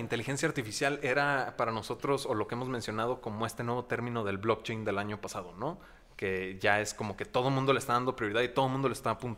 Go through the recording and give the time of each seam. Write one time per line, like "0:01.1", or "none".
none